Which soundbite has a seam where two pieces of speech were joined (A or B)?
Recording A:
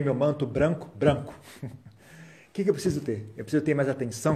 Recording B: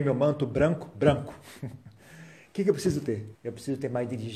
B